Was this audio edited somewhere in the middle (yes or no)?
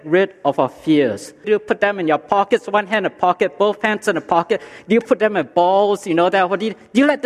yes